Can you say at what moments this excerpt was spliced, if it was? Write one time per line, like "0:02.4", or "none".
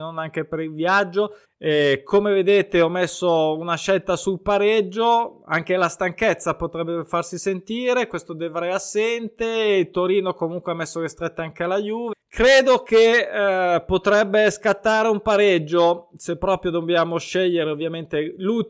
0:01.4
0:12.1

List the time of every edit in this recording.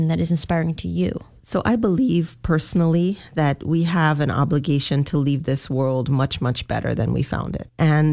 none

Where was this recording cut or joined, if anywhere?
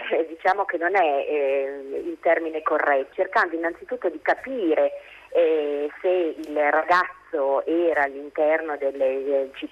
0:03.1

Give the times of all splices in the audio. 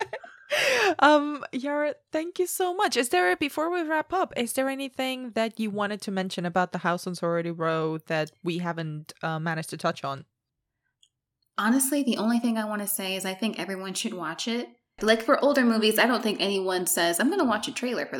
0:15.0

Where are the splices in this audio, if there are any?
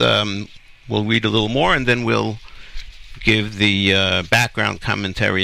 none

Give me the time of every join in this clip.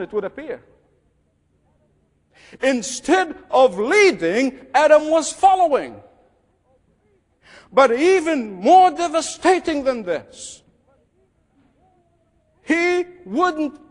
none

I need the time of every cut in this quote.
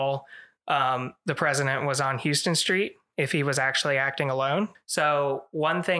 0:04.7

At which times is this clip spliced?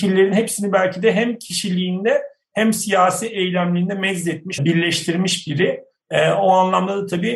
0:04.6

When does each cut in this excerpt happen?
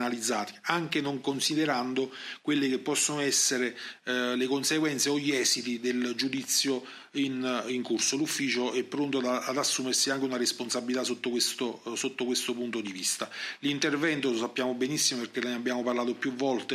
none

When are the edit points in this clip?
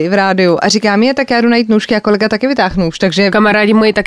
none

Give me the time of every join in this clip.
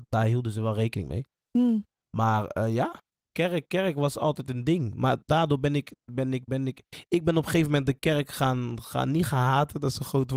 none

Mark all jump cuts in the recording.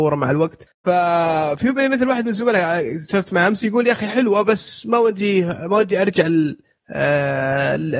none

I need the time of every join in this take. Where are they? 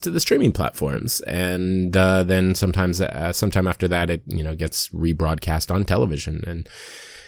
none

